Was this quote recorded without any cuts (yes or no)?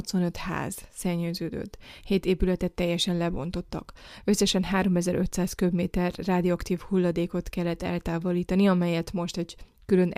yes